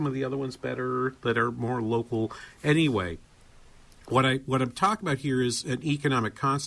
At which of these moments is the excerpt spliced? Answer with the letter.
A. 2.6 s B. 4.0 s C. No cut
C